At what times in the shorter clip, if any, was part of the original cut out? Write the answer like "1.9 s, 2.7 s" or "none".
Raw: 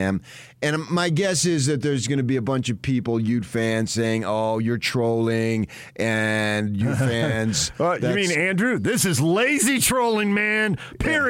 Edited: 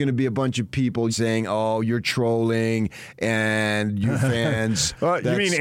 1.1 s